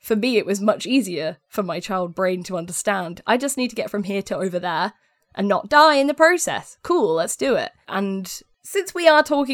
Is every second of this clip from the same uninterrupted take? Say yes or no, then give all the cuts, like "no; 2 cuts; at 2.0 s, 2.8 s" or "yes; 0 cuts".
no; 1 cut; at 7.9 s